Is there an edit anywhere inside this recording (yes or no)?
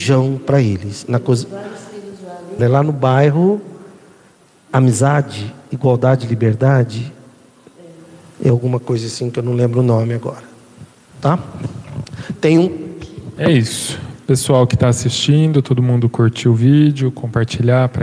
yes